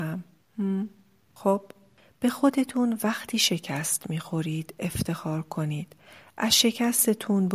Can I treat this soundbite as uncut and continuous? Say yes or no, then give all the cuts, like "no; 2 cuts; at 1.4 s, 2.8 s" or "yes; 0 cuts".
no; 1 cut; at 1.3 s